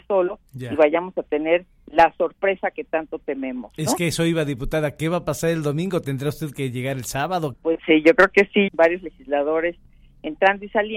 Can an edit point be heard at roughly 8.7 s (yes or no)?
yes